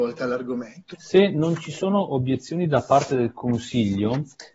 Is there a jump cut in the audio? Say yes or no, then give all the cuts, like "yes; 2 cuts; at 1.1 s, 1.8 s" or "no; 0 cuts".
yes; 1 cut; at 0.9 s